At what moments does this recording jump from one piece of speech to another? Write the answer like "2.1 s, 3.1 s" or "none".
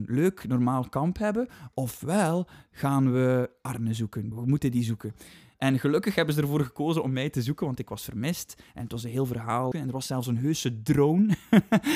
4.3 s, 9.7 s